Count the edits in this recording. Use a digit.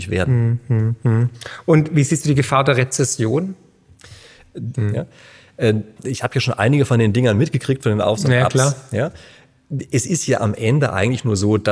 2